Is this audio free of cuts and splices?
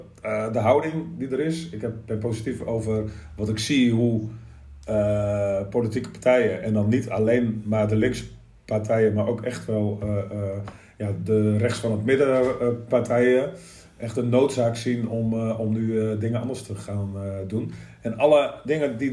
yes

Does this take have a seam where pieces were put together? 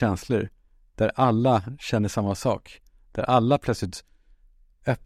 no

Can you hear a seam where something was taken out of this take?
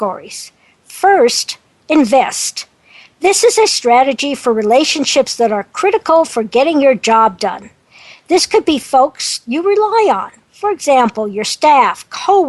no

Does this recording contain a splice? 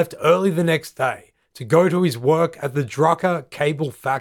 no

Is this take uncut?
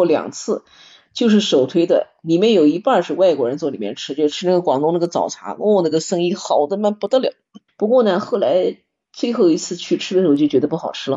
no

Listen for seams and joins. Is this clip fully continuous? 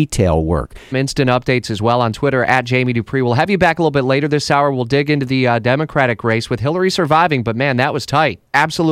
no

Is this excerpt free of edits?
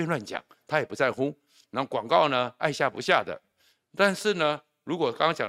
yes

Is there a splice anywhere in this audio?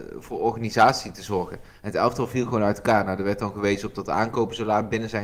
no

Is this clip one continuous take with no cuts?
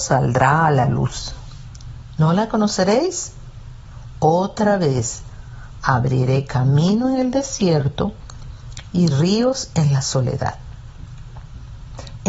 yes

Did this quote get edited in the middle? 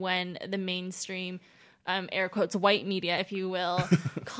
no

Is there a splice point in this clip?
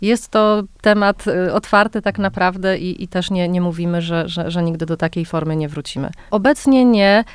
yes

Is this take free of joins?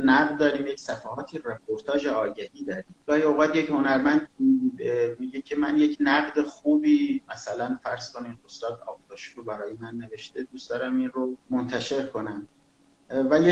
no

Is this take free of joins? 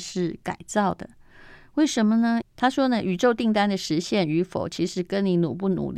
no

